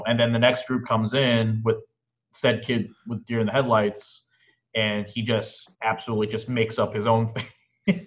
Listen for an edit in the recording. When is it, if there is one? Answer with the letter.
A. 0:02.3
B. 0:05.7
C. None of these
B